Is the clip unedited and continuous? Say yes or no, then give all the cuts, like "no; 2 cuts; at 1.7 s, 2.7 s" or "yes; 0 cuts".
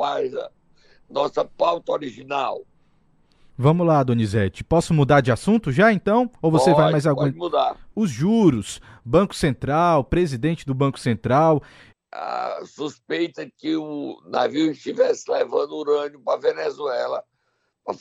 no; 2 cuts; at 7.9 s, 11.9 s